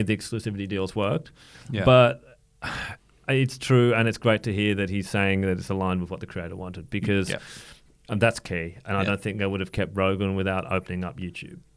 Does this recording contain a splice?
no; 0 cuts

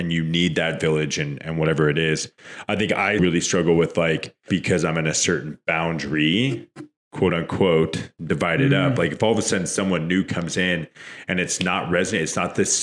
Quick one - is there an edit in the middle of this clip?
yes; 2 cuts; at 3.2 s, 4.5 s

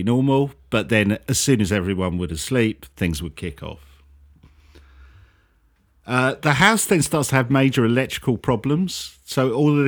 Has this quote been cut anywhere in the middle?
no; 0 cuts

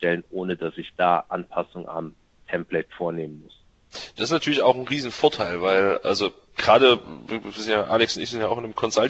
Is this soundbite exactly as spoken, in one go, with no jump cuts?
yes; 0 cuts

